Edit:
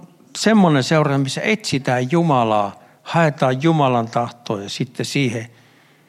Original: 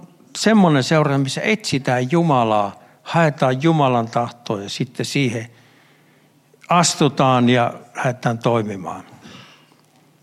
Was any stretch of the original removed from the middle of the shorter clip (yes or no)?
no